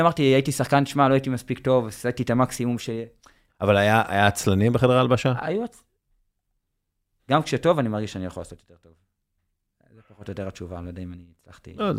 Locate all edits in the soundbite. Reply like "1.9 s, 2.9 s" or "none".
3.5 s, 7.2 s